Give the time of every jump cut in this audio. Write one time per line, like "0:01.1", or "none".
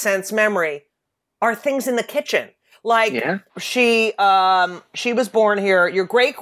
0:03.5

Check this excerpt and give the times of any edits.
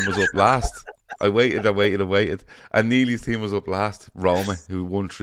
none

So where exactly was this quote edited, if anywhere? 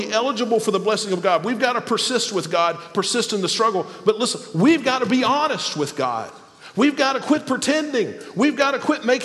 none

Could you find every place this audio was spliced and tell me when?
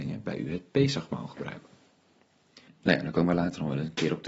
0:02.7

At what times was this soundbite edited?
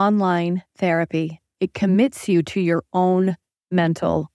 0:01.5

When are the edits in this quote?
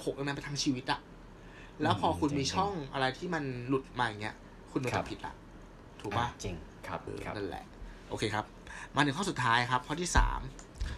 0:07.1

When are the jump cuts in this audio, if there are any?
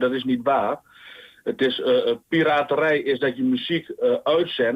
none

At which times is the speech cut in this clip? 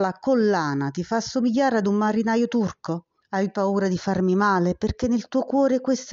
0:03.2

